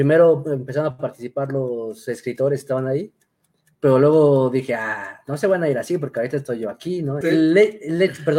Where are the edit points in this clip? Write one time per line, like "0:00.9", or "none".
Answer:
0:07.2